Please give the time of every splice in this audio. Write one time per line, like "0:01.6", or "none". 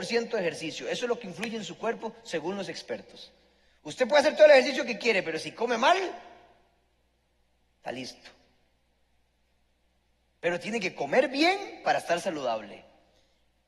none